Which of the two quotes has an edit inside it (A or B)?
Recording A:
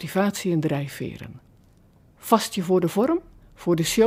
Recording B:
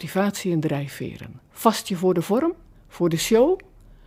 B